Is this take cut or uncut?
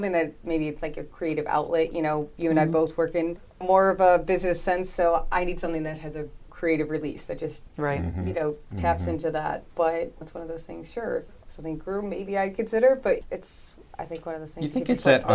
uncut